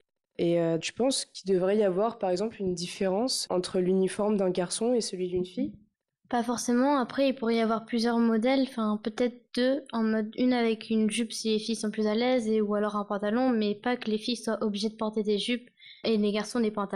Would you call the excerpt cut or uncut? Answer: uncut